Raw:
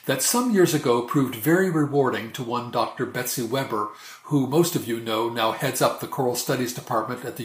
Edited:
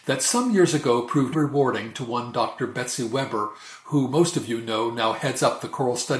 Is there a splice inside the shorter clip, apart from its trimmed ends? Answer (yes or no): yes